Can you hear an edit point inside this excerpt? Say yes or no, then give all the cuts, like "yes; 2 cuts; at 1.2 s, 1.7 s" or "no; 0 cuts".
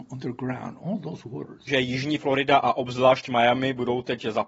yes; 1 cut; at 1.7 s